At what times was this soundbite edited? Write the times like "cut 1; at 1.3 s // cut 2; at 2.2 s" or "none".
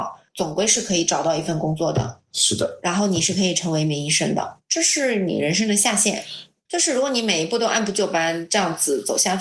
cut 1; at 6.6 s